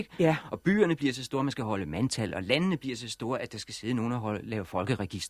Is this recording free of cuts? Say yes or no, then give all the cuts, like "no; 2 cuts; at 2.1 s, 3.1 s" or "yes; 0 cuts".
yes; 0 cuts